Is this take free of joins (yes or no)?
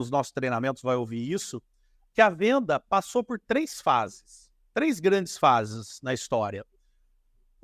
yes